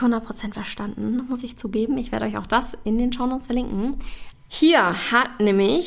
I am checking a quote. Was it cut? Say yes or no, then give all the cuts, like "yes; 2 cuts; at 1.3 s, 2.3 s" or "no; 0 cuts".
yes; 1 cut; at 4.3 s